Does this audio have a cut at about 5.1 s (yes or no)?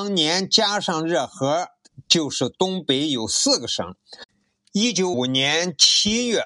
yes